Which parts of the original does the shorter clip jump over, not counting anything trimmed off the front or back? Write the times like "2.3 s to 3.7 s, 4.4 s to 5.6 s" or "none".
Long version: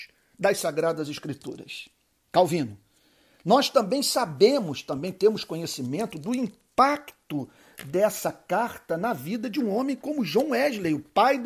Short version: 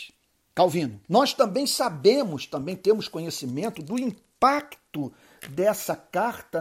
2.8 s to 3.4 s